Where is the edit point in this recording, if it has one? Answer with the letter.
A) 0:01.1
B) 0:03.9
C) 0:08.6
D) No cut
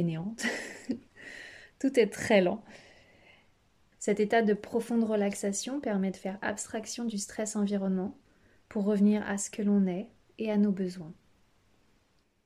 B